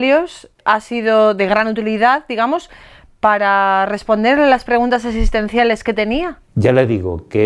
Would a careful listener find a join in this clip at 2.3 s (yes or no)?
no